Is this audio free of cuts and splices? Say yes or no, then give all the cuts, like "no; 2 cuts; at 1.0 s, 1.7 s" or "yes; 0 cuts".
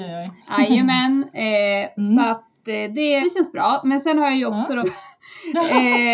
no; 2 cuts; at 3.2 s, 4.8 s